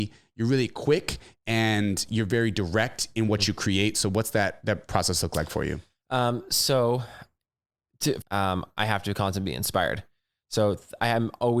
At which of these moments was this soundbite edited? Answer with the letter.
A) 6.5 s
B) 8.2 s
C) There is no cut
B